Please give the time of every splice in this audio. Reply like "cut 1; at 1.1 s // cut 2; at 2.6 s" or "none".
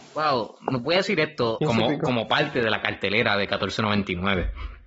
cut 1; at 1.6 s